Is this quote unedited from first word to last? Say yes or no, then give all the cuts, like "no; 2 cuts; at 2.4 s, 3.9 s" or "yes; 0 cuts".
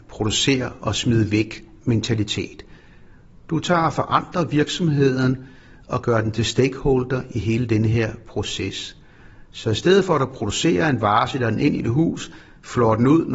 yes; 0 cuts